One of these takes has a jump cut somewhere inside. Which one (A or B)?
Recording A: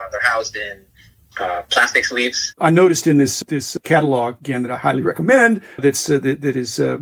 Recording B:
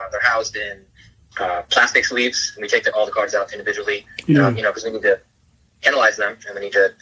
A